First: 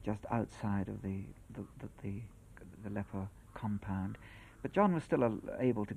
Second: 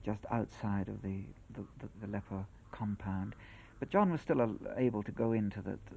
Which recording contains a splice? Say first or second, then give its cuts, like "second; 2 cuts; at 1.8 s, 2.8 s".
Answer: second; 1 cut; at 1.9 s